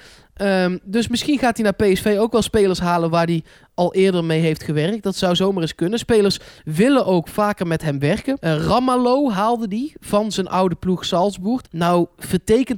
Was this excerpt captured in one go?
no; 2 cuts; at 8.4 s, 11.6 s

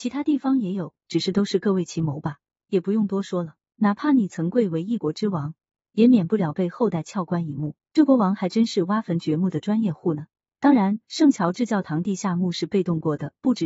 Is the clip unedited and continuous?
no; 2 cuts; at 3.7 s, 7.8 s

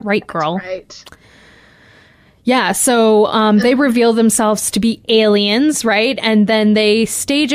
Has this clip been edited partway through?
no; 0 cuts

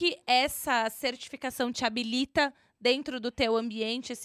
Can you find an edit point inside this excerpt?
no; 0 cuts

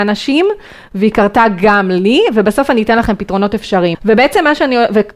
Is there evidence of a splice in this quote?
yes; 1 cut; at 3.9 s

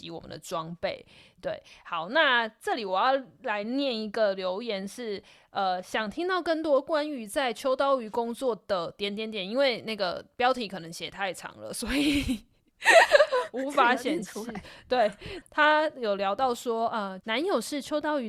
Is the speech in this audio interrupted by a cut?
yes; 2 cuts; at 15.4 s, 17.2 s

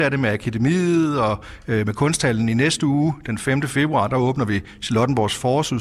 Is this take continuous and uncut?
yes; 0 cuts

